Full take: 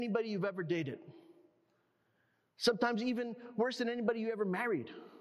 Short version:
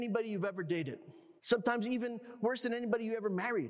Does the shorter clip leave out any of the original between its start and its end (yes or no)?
yes